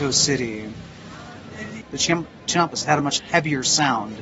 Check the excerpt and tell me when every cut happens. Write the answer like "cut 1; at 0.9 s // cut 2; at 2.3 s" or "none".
cut 1; at 1.8 s